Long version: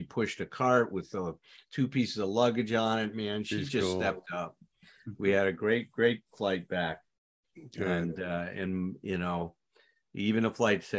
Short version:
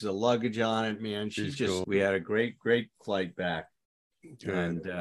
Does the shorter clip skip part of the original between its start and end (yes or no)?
yes